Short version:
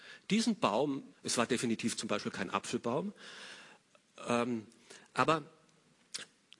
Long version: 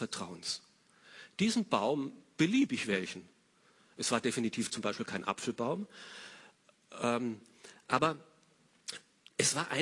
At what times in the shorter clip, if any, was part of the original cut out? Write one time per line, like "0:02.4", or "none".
0:01.1